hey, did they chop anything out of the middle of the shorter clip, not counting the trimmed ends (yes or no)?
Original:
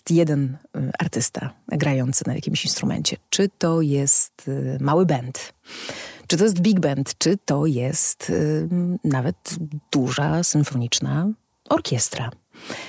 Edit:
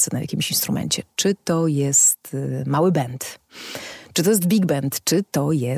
no